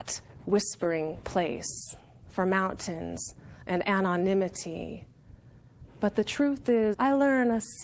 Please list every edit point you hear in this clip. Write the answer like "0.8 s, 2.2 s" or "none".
6.9 s